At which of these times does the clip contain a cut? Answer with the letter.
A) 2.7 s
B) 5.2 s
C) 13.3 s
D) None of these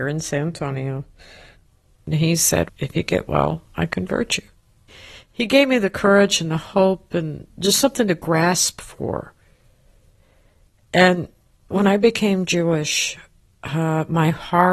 A